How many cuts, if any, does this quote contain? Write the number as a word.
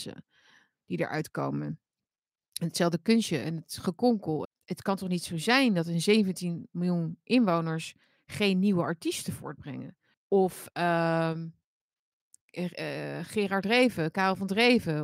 two